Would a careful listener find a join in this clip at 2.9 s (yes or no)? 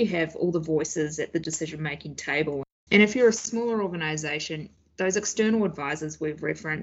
yes